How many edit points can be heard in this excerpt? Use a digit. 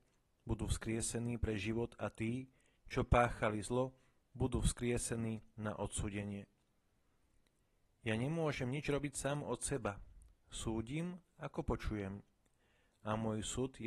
0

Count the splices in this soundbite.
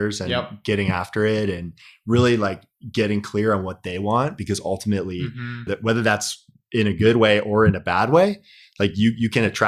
1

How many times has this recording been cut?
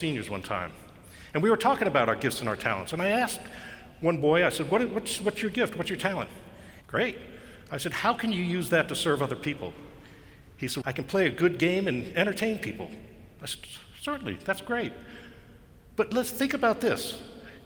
2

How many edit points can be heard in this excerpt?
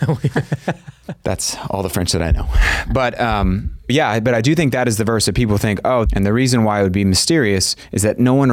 2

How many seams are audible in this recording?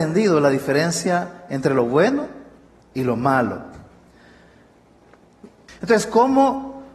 1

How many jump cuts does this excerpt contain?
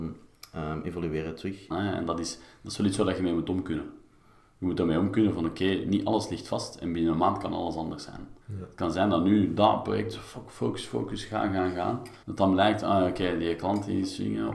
3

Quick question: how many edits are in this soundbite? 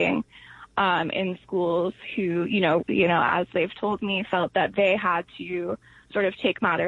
1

